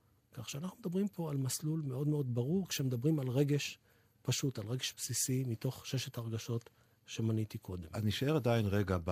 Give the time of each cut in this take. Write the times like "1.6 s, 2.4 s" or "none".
none